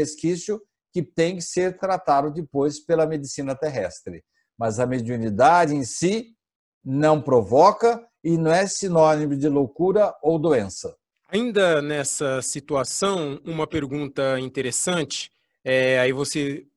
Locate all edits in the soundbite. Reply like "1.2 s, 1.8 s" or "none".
none